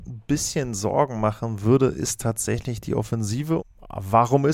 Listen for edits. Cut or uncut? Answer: cut